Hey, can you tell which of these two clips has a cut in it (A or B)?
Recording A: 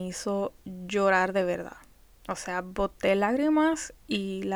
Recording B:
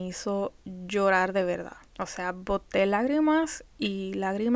B